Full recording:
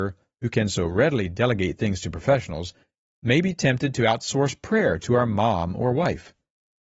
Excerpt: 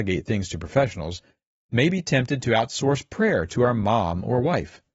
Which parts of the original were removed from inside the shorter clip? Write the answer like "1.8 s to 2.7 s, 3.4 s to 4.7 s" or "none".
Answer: none